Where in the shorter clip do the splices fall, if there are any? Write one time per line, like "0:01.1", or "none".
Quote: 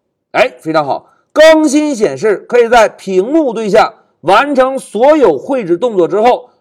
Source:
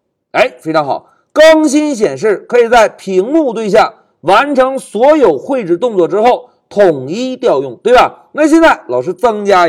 none